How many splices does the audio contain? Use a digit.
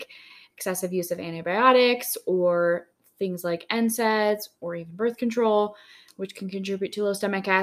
1